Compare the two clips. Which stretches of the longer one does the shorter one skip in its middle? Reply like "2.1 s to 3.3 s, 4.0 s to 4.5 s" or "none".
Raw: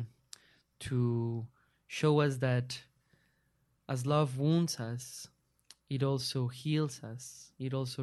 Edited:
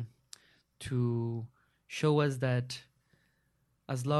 none